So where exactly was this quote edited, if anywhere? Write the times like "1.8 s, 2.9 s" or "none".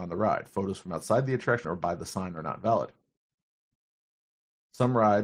1.6 s